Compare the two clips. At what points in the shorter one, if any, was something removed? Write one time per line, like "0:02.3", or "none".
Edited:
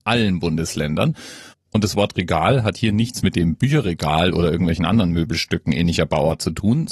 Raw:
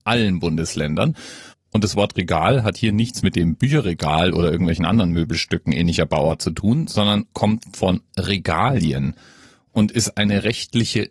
none